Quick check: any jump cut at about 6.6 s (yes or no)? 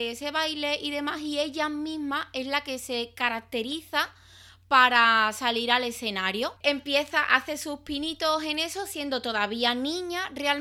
yes